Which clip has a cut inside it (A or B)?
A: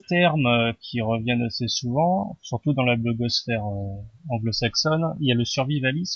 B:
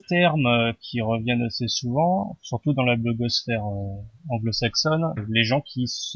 B